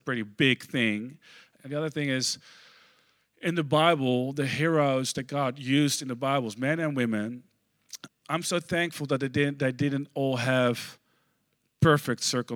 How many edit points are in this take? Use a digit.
2